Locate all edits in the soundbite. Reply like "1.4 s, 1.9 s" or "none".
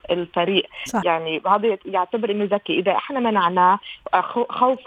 1.0 s